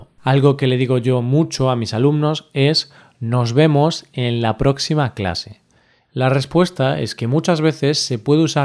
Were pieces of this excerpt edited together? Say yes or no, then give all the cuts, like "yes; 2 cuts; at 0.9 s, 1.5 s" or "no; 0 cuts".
yes; 1 cut; at 6.0 s